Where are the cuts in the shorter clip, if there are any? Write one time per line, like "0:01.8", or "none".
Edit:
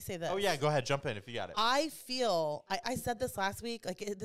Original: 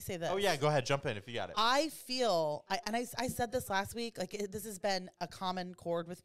0:02.8